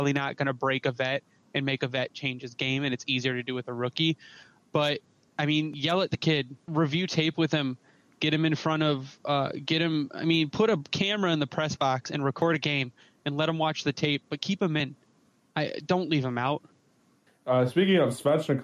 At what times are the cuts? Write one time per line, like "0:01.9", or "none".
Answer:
0:06.7